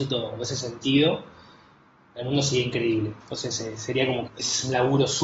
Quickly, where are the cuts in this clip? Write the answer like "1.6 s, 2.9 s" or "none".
3.2 s, 4.3 s